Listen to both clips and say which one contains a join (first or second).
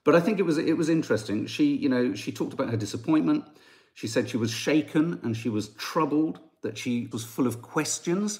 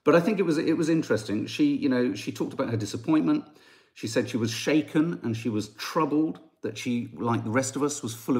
first